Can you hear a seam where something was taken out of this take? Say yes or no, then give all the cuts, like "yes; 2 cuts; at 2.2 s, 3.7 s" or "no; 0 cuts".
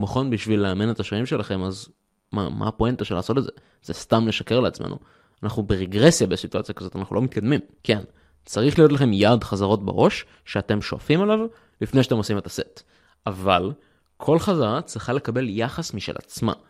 yes; 1 cut; at 7.8 s